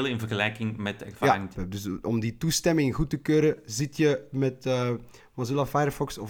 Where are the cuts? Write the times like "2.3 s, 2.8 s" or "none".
1.5 s